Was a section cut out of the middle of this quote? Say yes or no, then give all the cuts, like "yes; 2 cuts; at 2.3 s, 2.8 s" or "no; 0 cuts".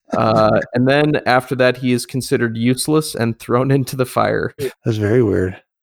yes; 1 cut; at 4.6 s